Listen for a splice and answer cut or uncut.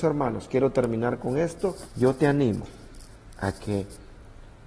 cut